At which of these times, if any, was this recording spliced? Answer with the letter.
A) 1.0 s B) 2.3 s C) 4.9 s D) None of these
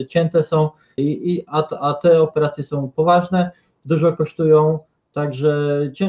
A